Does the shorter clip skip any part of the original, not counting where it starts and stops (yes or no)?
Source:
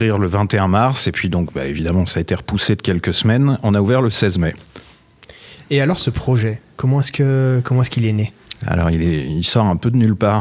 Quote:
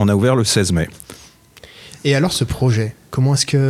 no